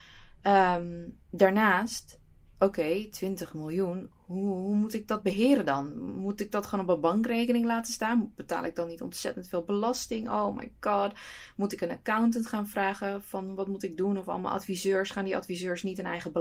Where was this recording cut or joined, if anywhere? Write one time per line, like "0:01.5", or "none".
none

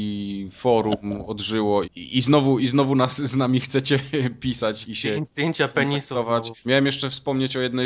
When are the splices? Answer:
0:01.8
0:05.2
0:06.6

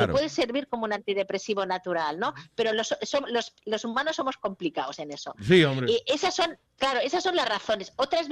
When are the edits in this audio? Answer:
0:06.7

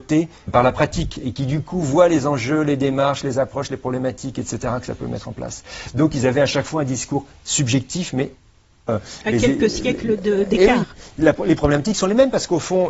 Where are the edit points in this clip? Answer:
0:08.9

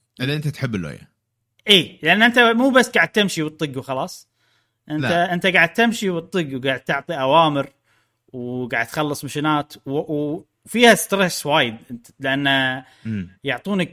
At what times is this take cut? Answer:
none

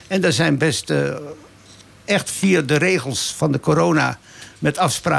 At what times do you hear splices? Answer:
none

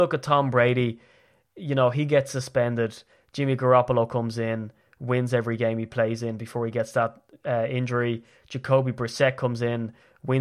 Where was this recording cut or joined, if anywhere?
none

